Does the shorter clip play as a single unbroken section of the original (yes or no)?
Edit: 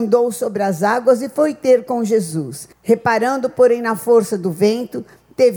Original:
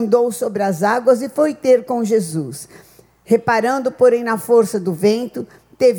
no